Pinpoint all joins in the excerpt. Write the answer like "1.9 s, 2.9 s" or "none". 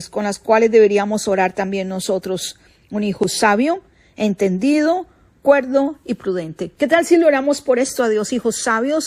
6.7 s